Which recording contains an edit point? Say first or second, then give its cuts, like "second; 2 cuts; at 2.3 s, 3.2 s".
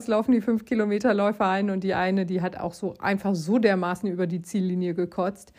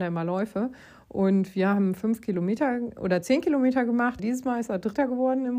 second; 1 cut; at 4.2 s